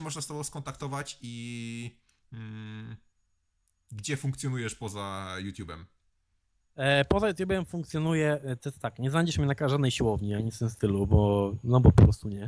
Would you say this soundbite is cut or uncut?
uncut